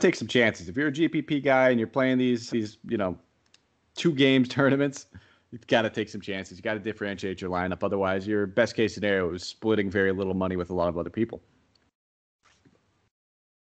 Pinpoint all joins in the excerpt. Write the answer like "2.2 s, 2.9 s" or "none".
2.5 s